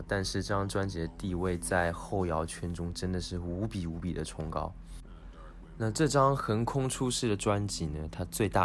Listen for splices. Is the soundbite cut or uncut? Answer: uncut